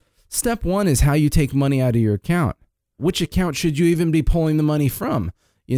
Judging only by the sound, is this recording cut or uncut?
cut